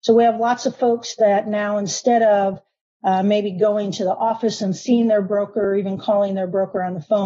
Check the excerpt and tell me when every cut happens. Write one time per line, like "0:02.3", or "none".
none